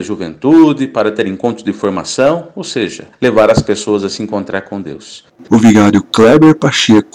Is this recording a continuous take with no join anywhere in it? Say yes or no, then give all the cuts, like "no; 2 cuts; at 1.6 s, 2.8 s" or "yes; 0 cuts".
no; 2 cuts; at 3.1 s, 5.4 s